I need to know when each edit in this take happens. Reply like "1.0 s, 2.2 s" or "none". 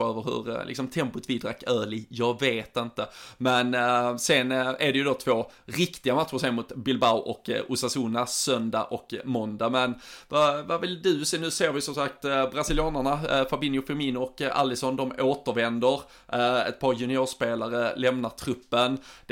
none